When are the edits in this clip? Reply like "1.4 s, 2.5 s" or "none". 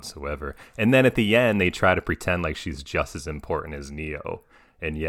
none